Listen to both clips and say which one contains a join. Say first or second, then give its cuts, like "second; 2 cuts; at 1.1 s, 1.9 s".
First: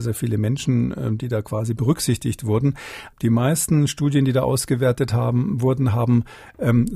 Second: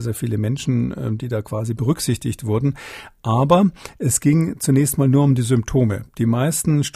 first; 1 cut; at 3.1 s